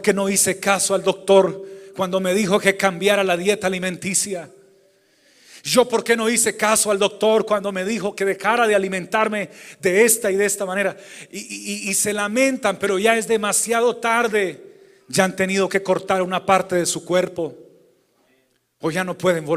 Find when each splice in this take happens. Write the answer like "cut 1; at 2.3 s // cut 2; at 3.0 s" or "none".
none